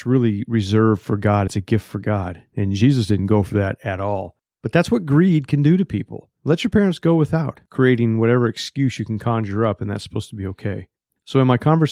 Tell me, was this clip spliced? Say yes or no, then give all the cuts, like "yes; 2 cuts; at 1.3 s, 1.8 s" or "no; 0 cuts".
no; 0 cuts